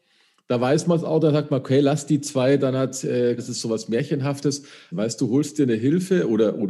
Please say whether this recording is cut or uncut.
cut